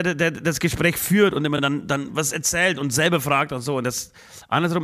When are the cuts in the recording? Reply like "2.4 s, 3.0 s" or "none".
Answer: none

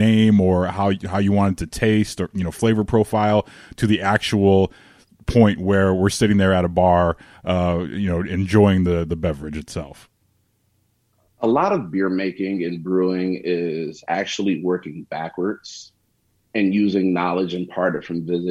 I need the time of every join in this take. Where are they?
none

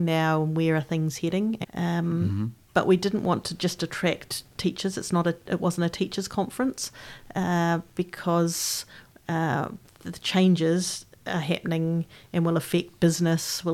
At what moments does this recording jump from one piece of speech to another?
1.6 s

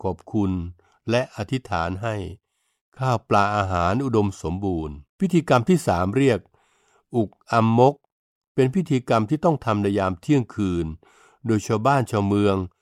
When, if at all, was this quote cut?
5.1 s

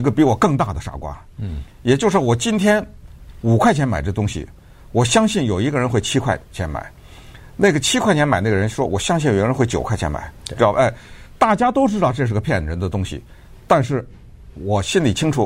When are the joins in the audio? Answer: none

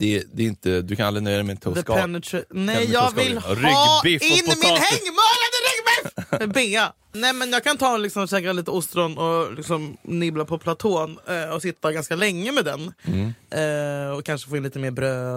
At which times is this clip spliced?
7.1 s

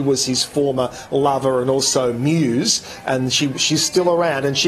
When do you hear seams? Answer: none

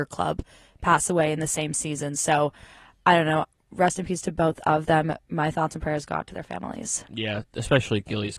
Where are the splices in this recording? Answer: none

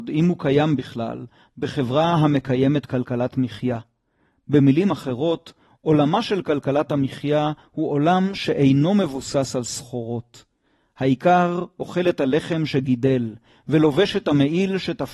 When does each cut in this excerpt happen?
none

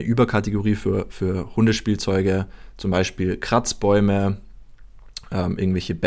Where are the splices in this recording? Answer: none

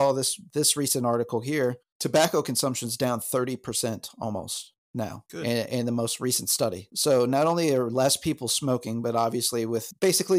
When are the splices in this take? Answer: none

